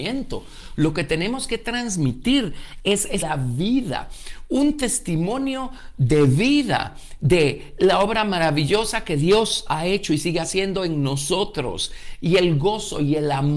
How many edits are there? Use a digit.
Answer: 1